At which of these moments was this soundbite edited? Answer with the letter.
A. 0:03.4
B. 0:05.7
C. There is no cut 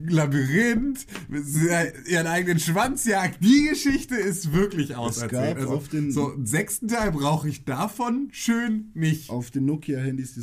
C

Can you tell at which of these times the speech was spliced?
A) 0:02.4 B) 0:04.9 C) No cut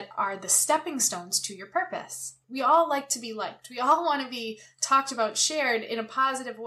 A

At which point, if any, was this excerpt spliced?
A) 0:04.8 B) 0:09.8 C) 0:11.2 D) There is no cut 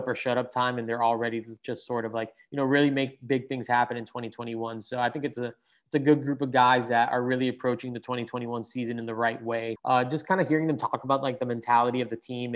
B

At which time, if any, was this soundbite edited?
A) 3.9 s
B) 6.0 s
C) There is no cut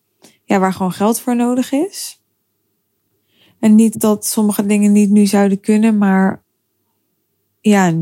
A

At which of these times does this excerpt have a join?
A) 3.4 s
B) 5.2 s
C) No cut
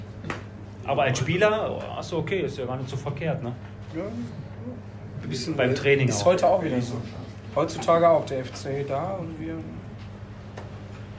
B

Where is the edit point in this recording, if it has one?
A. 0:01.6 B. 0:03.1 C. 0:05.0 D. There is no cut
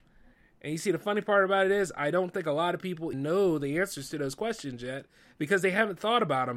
B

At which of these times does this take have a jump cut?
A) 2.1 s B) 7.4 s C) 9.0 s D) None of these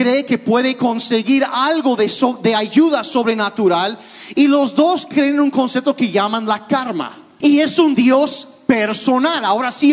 B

